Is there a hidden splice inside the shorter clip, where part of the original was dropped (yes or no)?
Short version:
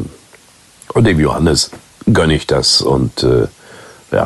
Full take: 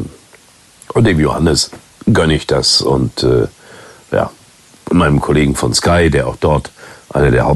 no